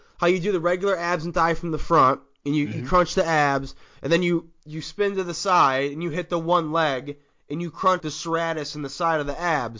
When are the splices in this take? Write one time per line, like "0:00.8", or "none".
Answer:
0:08.0